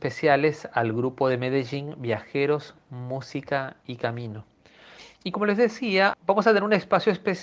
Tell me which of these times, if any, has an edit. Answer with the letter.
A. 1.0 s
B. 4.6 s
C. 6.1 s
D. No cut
C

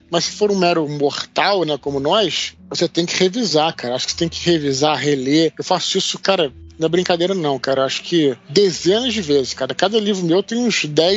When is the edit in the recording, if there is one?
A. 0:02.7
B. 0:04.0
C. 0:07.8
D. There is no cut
D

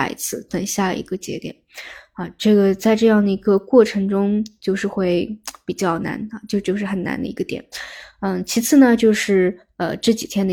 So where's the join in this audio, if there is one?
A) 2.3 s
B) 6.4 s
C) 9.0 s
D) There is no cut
D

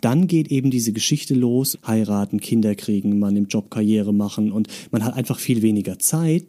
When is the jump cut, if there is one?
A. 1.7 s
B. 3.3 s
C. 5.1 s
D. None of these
A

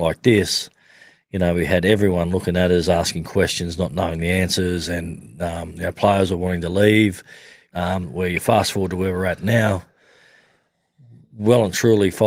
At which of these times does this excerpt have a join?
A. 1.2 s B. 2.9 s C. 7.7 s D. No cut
C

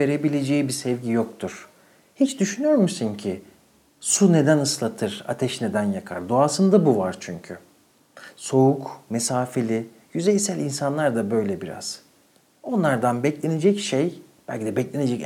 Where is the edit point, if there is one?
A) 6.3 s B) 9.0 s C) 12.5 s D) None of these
D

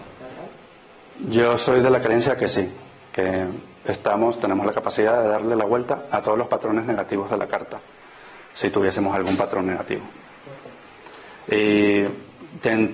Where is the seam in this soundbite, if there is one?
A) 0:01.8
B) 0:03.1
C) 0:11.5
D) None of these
C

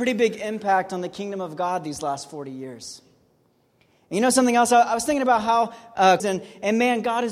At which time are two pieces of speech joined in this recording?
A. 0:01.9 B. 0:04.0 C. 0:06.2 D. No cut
C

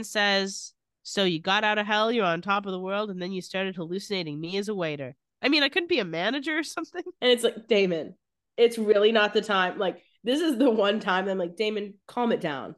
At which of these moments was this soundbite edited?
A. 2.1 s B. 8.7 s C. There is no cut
C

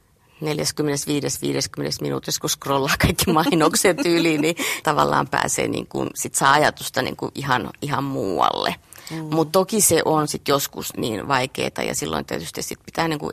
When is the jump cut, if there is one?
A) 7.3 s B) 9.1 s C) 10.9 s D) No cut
C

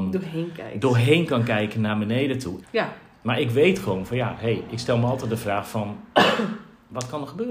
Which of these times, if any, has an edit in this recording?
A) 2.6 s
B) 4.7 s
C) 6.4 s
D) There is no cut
A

